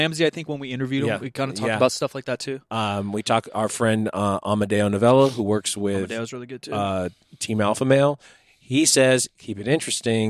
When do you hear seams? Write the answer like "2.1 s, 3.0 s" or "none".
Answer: none